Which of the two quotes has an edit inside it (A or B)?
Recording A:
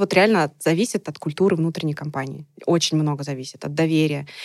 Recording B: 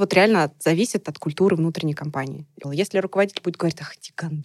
B